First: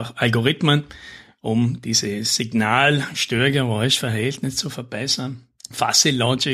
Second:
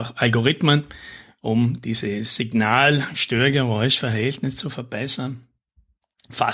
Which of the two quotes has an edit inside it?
first; 1 cut; at 5.6 s

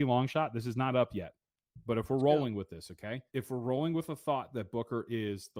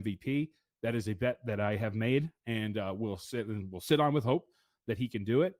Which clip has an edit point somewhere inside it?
first; 1 cut; at 3.3 s

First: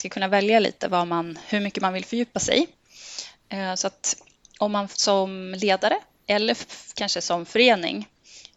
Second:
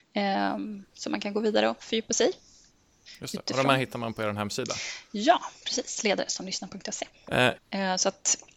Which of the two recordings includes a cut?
second; 1 cut; at 7.6 s

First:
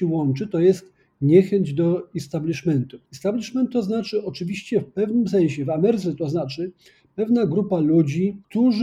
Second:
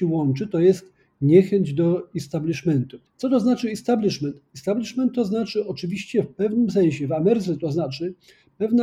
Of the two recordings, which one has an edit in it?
first; 1 cut; at 3.1 s

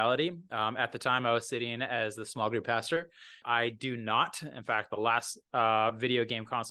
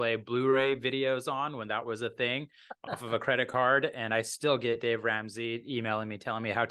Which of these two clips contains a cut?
first; 1 cut; at 3.4 s

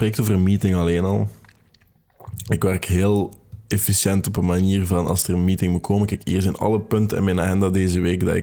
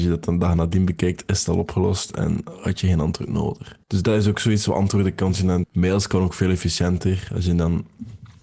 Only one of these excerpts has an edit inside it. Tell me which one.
second; 2 cuts; at 3.8 s, 5.6 s

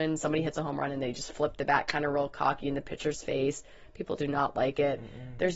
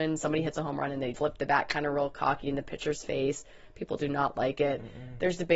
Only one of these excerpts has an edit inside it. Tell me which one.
second; 1 cut; at 1.1 s

